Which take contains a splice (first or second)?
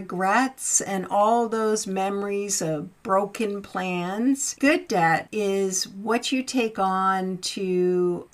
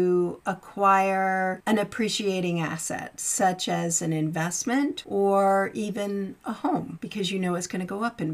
first